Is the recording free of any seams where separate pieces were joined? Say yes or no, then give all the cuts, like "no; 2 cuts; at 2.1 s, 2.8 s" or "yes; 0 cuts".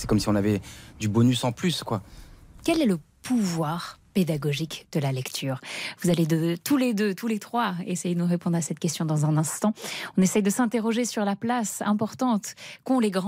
yes; 0 cuts